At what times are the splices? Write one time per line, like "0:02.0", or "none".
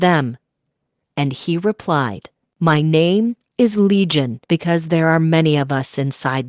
0:01.0
0:04.4